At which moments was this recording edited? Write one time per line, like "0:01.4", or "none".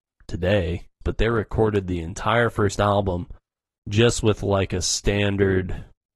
0:01.0